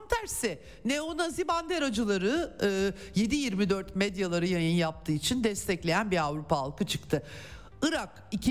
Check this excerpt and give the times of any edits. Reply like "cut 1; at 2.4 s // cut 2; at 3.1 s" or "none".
none

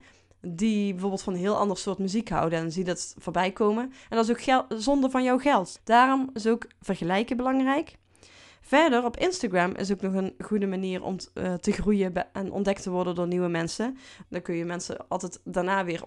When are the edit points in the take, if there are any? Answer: cut 1; at 5.7 s // cut 2; at 14.2 s

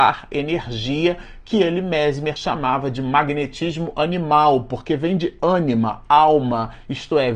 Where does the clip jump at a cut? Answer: none

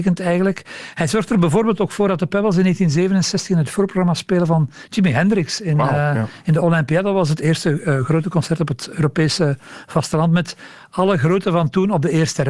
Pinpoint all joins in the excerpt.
none

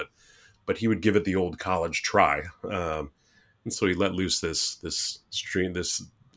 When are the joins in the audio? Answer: none

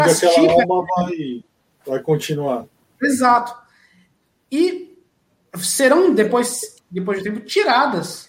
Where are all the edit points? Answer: none

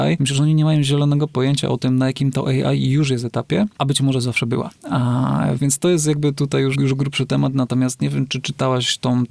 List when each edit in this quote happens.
cut 1; at 5.6 s // cut 2; at 6.7 s

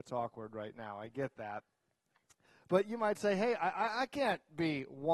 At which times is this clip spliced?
none

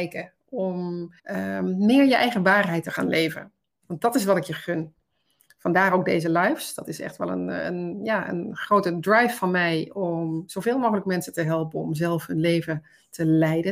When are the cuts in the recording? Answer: cut 1; at 1.2 s

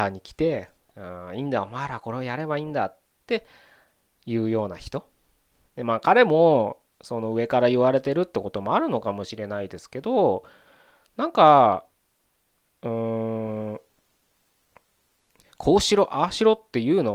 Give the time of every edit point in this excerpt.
cut 1; at 5.7 s

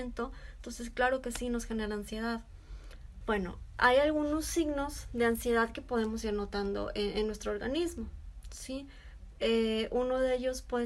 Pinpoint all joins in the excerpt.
cut 1; at 3.2 s

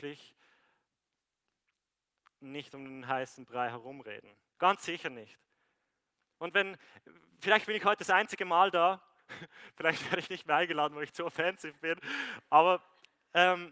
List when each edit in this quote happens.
cut 1; at 4.5 s

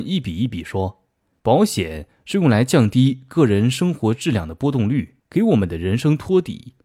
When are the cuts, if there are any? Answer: cut 1; at 1.4 s // cut 2; at 5.2 s

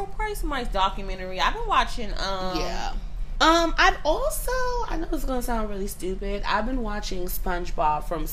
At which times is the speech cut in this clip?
cut 1; at 3.4 s

